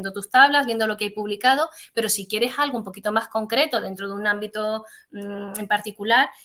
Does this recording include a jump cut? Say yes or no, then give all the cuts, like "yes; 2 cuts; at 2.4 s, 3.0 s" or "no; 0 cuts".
no; 0 cuts